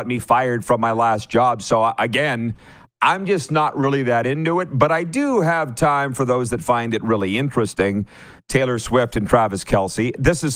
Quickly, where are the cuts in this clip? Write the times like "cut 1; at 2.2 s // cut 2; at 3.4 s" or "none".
none